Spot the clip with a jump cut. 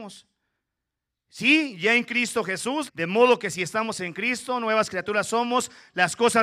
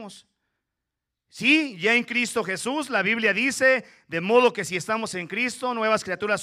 first; 1 cut; at 2.9 s

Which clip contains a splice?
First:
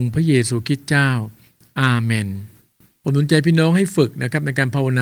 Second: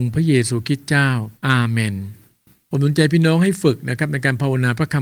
second; 1 cut; at 1.4 s

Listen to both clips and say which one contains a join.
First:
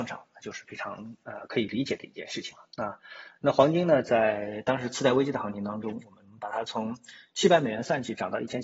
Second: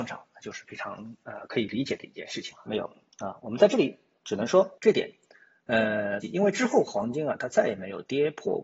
second; 3 cuts; at 2.7 s, 4.8 s, 6.2 s

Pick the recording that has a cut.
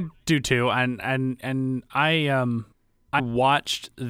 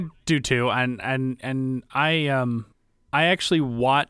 first; 1 cut; at 3.2 s

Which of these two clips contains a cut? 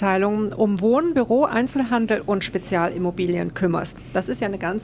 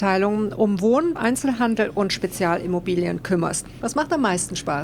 second; 2 cuts; at 1.2 s, 3.8 s

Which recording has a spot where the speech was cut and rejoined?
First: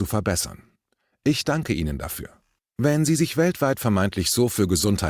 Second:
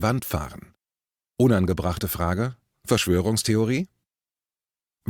first; 1 cut; at 2.6 s

